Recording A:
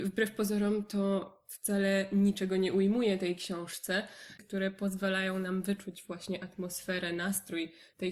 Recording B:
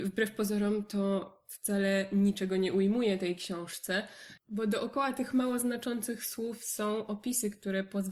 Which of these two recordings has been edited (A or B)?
A